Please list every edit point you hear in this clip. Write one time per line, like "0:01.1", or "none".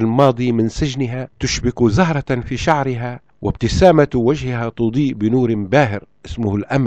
0:01.3
0:03.3